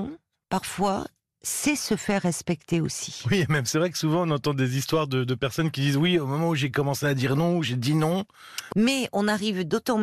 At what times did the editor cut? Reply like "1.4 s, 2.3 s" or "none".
8.7 s